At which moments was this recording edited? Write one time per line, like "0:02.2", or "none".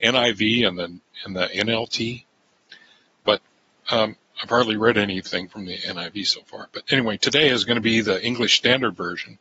none